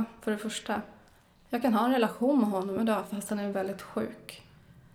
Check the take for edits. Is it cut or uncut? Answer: cut